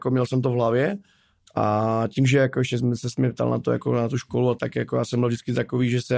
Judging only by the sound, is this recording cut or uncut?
cut